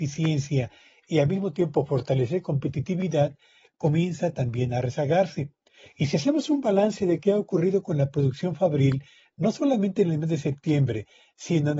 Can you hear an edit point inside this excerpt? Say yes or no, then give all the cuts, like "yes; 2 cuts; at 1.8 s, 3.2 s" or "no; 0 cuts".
no; 0 cuts